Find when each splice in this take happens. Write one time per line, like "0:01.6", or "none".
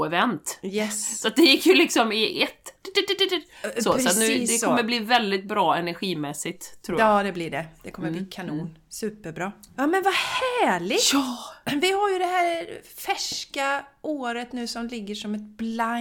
0:09.8